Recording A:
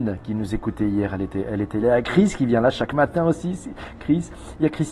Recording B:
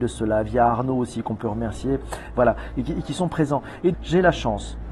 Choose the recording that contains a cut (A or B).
B